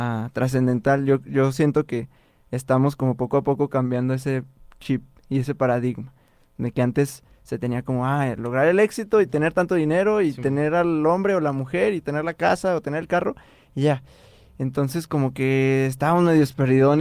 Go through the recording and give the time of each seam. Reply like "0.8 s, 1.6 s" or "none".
none